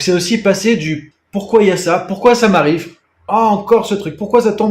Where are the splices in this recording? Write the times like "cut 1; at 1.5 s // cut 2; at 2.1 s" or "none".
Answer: cut 1; at 1.1 s // cut 2; at 3.3 s